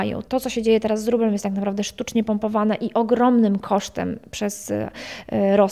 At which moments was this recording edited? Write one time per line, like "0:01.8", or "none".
none